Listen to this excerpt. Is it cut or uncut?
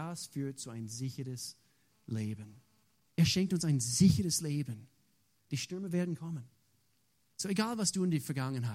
cut